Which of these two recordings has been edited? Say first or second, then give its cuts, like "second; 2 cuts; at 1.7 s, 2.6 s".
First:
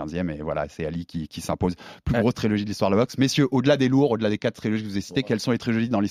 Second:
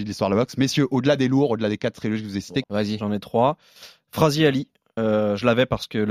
second; 1 cut; at 2.6 s